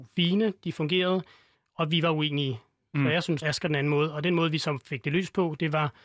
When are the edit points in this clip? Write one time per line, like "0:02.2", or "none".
0:03.4